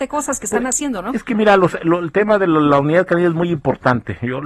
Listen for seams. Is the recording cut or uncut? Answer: uncut